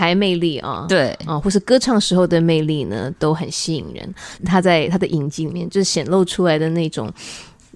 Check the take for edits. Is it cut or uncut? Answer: cut